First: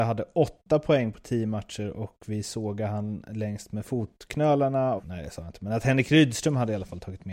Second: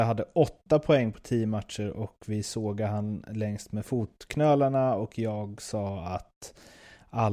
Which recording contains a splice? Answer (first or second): first